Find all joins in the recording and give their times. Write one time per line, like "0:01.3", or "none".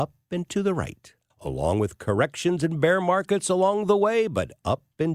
0:01.3